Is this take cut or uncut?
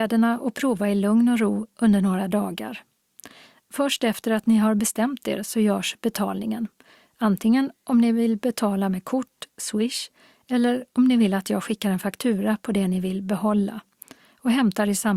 uncut